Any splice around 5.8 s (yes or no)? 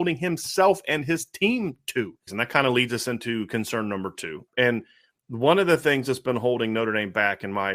no